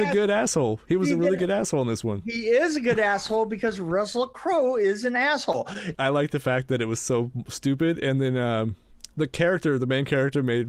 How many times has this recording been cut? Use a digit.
1